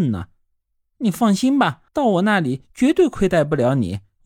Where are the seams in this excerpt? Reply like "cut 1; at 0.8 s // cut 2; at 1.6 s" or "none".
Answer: cut 1; at 1.9 s

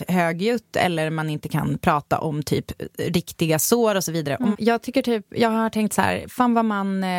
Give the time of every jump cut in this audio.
cut 1; at 4.5 s

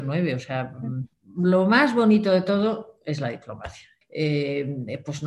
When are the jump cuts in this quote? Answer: cut 1; at 1.1 s // cut 2; at 4.0 s

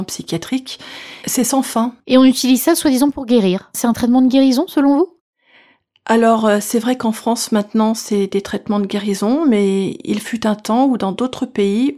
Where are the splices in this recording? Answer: cut 1; at 2.0 s

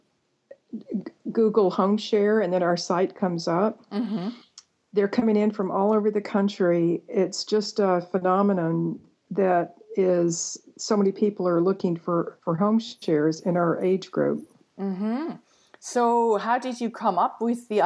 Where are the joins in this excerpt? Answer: none

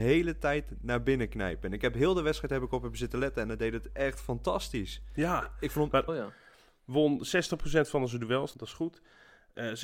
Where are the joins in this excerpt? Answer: cut 1; at 6.1 s // cut 2; at 8.5 s

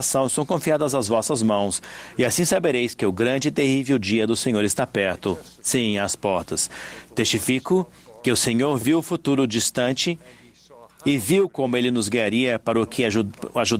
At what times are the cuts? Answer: none

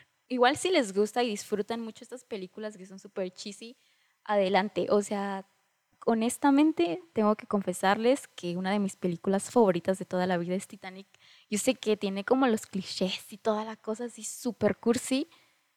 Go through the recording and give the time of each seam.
none

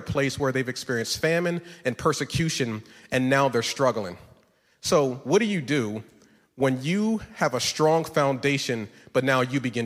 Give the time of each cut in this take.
none

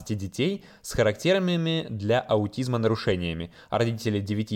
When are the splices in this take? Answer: none

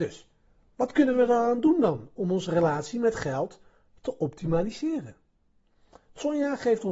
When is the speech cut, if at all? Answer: none

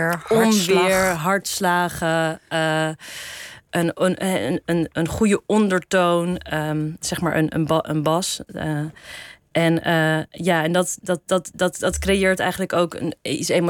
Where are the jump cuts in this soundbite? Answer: none

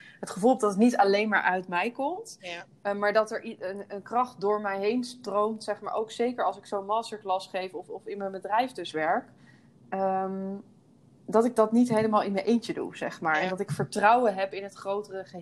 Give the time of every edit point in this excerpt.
none

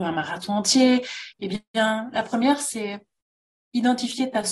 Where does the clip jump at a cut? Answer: cut 1; at 1.3 s

